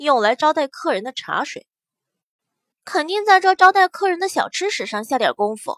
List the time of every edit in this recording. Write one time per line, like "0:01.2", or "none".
0:02.7